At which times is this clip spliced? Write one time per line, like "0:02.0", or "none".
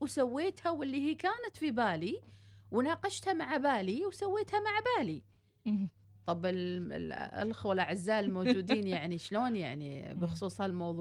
none